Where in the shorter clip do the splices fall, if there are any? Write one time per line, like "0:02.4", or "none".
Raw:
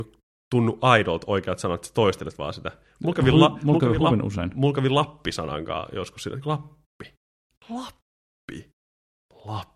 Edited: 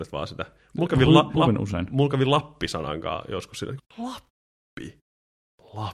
0:01.3
0:03.8